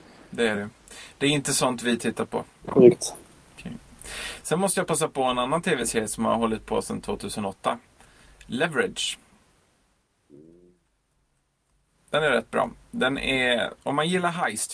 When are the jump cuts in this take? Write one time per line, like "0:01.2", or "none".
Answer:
0:02.6